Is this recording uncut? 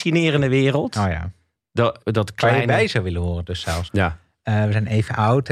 no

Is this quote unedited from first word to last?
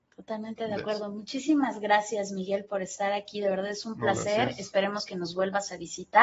yes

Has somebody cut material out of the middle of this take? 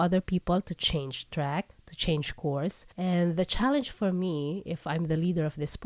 yes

